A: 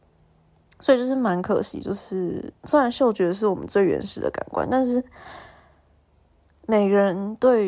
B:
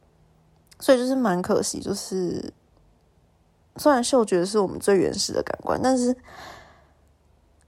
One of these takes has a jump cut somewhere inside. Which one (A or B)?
A